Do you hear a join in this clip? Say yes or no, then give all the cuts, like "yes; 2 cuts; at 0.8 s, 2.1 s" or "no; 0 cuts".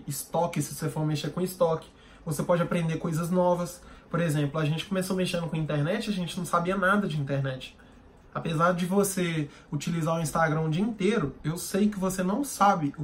no; 0 cuts